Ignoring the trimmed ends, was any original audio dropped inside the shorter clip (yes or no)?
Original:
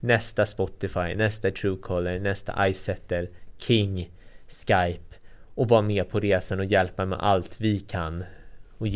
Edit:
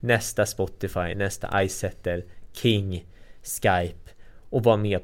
yes